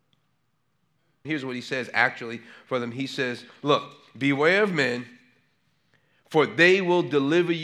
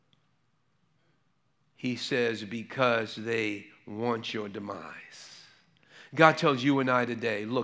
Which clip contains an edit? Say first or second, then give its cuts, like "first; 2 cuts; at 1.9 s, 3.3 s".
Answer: first; 1 cut; at 1.2 s